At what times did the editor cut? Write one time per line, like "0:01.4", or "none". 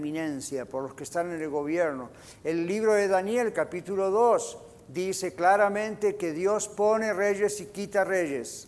none